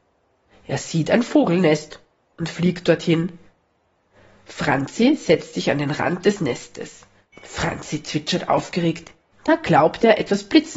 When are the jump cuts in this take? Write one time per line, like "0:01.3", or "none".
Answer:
0:07.3
0:09.3